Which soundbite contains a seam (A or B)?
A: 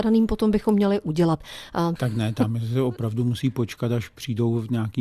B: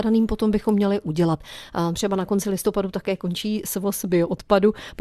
A